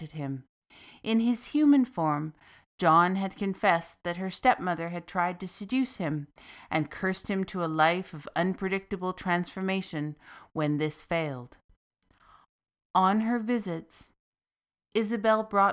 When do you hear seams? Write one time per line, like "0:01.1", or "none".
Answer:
none